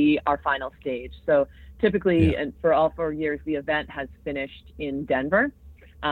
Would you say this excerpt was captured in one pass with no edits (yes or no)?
yes